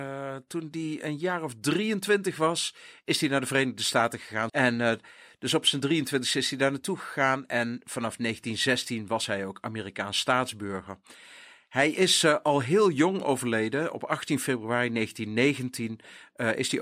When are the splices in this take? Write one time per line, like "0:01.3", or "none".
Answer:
0:04.5

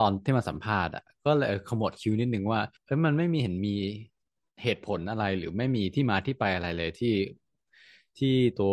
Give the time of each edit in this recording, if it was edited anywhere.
0:02.8

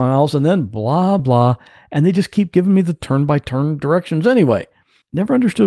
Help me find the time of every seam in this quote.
0:01.2

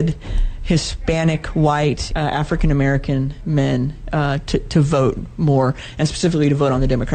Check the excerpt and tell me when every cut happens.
0:02.1

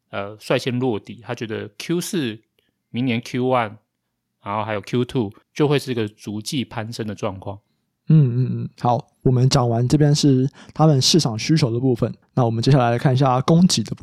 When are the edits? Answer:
0:05.4

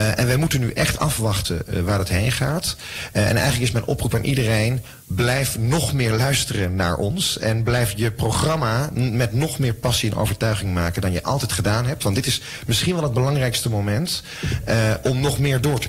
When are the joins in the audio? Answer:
none

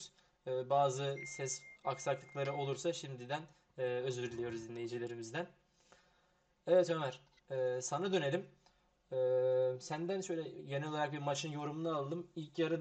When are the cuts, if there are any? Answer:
none

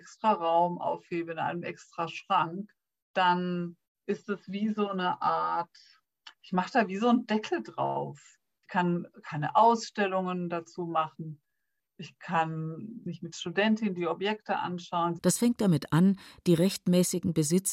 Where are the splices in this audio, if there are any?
0:15.2

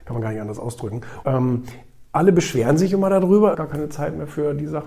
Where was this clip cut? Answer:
0:01.2
0:03.5

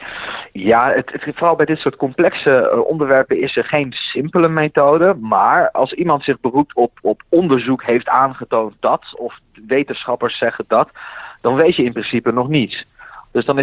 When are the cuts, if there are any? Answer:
0:05.7
0:07.0

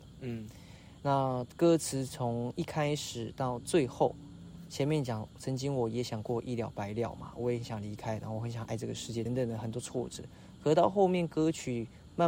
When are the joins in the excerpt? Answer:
0:09.3

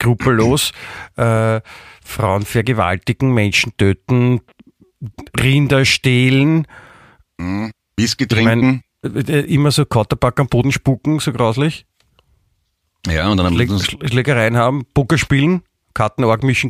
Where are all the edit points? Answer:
0:09.0

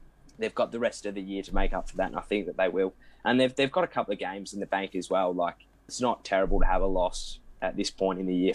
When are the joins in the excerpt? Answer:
0:05.9

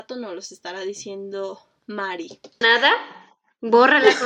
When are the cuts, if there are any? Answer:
0:02.6

